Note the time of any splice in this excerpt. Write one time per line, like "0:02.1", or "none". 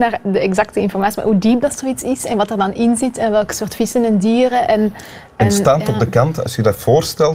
none